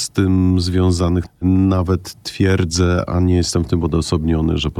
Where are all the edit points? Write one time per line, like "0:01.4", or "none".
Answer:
0:01.3